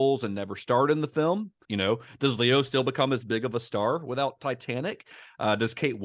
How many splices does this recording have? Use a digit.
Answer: 1